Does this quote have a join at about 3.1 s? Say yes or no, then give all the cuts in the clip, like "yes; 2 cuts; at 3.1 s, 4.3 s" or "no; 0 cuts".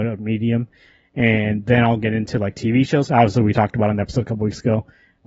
yes; 1 cut; at 3.1 s